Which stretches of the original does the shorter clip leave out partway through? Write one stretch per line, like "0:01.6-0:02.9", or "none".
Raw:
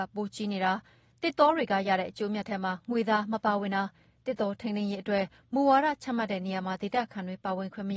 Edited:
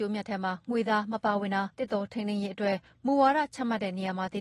0:03.9-0:04.2